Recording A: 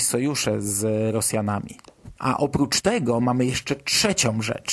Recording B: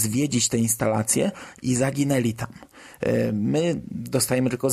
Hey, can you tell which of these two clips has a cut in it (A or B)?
A